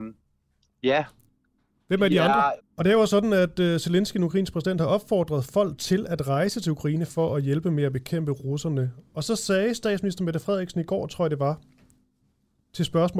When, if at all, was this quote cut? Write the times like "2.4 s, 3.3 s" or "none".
2.6 s